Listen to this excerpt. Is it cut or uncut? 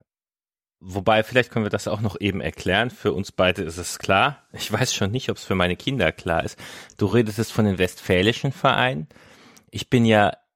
uncut